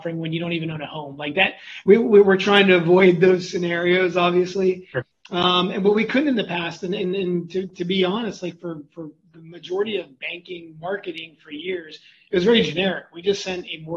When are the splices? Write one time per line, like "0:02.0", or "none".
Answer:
none